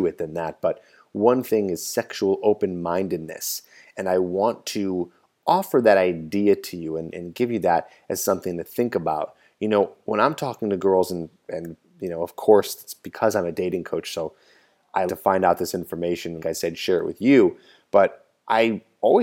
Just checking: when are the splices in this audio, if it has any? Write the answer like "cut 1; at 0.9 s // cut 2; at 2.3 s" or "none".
cut 1; at 15.1 s // cut 2; at 16.4 s